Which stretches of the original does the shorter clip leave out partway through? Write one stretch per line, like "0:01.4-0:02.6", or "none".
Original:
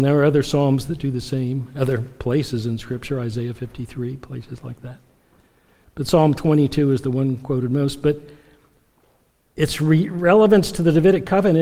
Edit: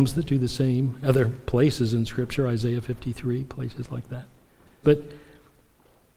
0:05.5-0:08.0